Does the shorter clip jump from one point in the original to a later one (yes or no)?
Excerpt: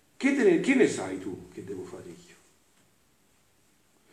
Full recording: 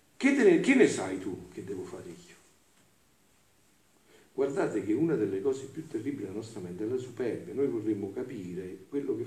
no